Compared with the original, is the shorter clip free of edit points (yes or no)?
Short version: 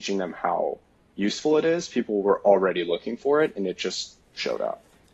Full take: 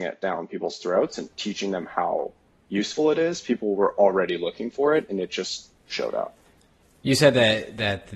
yes